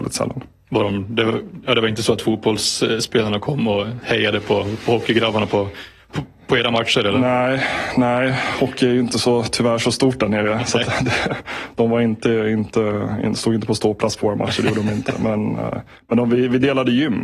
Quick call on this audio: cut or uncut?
uncut